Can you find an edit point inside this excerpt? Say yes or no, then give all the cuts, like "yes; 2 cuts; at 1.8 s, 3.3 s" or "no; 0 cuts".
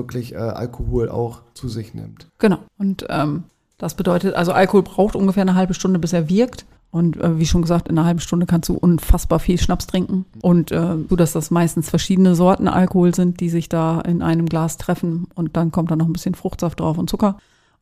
yes; 1 cut; at 11.1 s